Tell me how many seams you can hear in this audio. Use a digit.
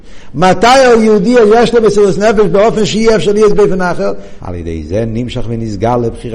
1